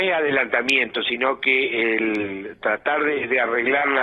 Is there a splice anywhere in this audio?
no; 0 cuts

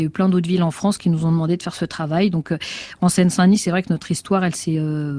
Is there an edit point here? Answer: no; 0 cuts

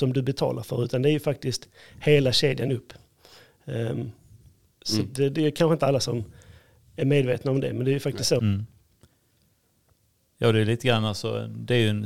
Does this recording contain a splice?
yes; 1 cut; at 8.4 s

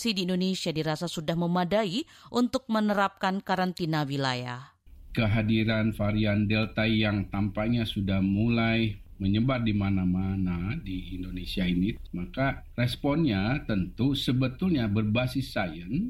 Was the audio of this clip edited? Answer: no; 0 cuts

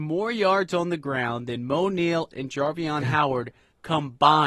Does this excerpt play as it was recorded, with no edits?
no; 1 cut; at 2.3 s

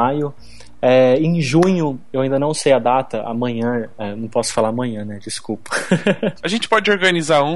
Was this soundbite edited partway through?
yes; 1 cut; at 6.4 s

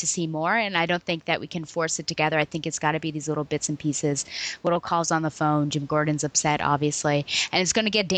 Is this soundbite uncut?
yes; 0 cuts

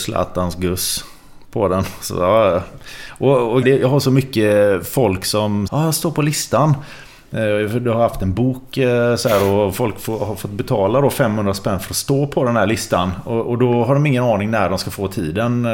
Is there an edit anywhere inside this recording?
yes; 2 cuts; at 3.6 s, 5.7 s

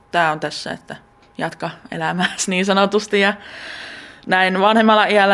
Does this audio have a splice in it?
no; 0 cuts

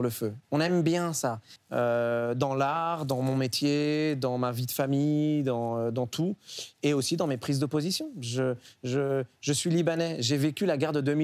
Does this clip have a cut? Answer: yes; 1 cut; at 1.6 s

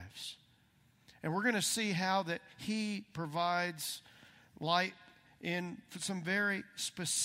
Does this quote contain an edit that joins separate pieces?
no; 0 cuts

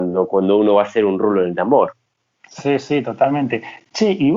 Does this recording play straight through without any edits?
yes; 0 cuts

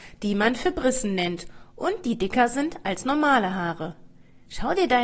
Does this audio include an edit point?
no; 0 cuts

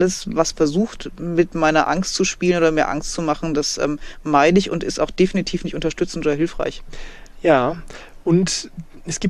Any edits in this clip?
no; 0 cuts

